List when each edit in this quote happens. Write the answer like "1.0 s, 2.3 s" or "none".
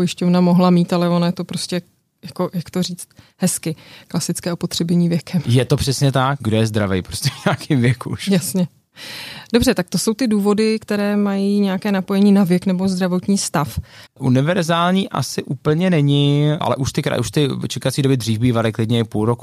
14.1 s